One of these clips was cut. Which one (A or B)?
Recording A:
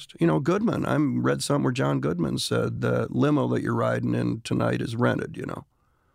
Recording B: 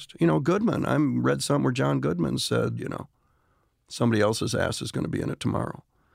B